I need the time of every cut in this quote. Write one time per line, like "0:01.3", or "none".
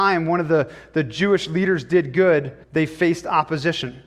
0:02.6